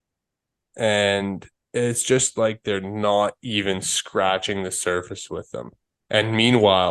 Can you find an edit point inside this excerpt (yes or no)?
no